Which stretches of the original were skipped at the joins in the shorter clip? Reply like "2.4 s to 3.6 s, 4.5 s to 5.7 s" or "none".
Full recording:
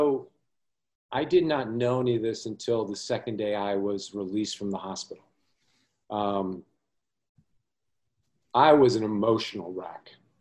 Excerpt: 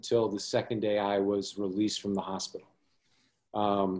none